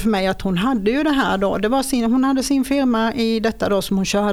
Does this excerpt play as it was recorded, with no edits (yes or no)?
yes